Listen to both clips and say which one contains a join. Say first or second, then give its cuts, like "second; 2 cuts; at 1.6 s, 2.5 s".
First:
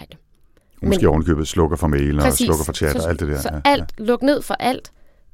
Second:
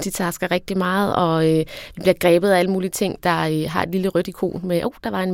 second; 1 cut; at 3.2 s